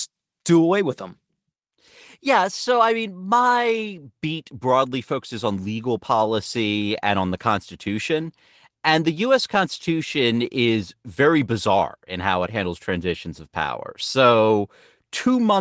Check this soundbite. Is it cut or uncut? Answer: uncut